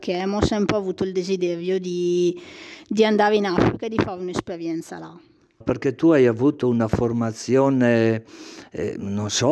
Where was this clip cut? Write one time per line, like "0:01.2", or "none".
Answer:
0:05.6